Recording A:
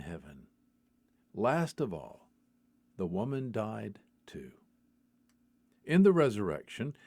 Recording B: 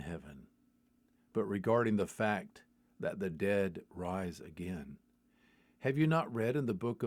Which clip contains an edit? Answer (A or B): A